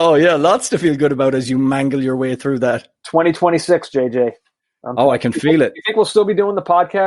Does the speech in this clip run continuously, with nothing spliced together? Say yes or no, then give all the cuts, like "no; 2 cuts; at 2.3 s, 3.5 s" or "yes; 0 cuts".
yes; 0 cuts